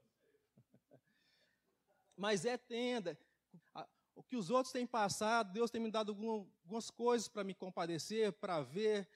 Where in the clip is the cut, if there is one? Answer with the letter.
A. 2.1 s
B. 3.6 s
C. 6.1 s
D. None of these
B